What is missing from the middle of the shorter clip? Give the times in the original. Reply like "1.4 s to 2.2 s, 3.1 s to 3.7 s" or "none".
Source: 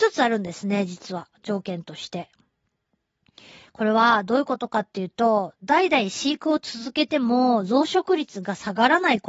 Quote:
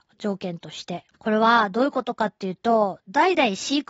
2.4 s to 3.7 s